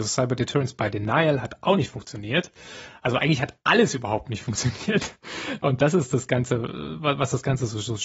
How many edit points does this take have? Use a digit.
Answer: 0